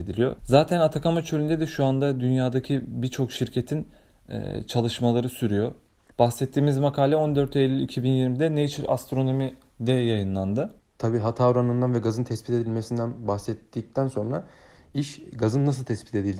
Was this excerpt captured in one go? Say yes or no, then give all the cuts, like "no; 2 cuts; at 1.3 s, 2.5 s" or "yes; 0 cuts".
yes; 0 cuts